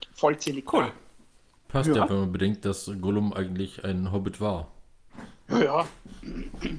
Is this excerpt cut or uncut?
uncut